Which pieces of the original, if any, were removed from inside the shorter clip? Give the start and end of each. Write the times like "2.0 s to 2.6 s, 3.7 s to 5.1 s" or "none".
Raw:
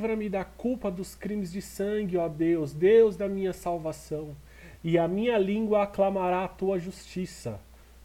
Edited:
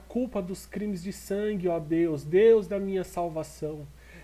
none